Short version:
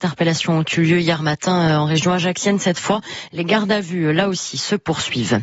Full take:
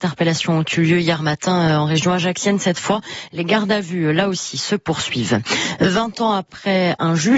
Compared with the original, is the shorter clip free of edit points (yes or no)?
yes